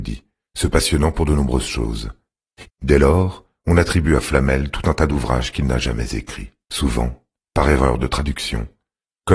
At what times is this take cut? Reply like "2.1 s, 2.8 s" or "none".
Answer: 2.6 s, 6.6 s